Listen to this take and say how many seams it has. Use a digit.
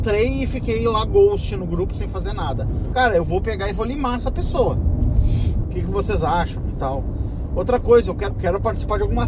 3